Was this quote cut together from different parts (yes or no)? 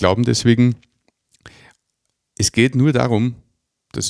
no